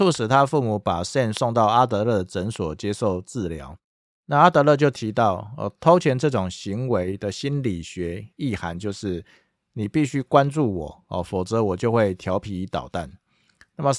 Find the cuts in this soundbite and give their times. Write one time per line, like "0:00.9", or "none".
none

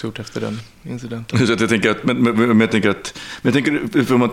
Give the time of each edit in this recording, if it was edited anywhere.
none

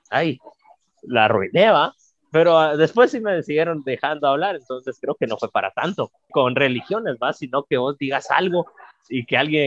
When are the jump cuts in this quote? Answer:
0:06.3

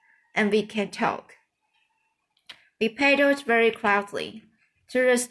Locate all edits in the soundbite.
none

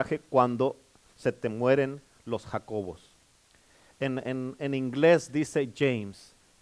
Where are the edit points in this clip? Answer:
none

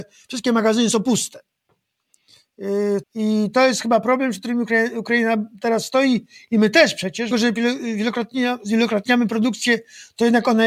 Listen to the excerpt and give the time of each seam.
0:03.0
0:07.3

